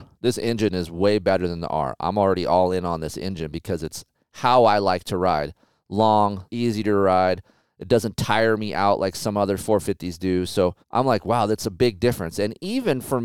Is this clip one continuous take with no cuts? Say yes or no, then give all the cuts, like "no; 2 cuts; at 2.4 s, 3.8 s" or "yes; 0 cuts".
no; 2 cuts; at 6.5 s, 10.8 s